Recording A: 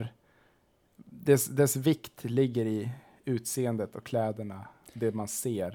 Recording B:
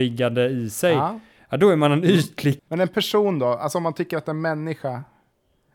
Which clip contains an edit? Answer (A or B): B